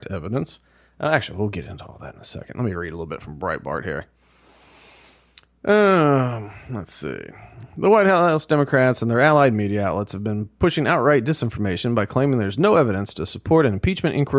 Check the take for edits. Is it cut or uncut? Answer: uncut